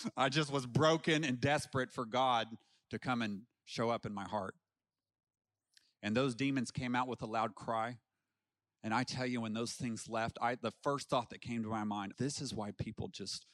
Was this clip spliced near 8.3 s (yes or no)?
no